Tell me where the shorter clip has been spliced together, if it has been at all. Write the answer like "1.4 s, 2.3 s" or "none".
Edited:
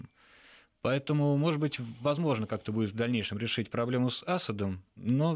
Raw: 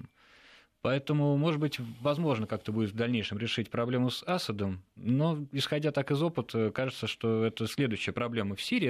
none